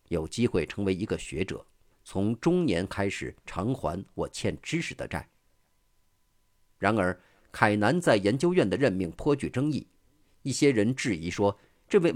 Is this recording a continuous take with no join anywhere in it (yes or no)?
yes